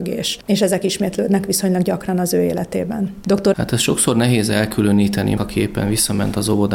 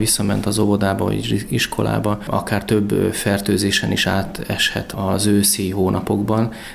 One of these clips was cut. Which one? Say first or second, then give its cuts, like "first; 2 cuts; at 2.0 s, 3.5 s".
first; 2 cuts; at 3.5 s, 5.4 s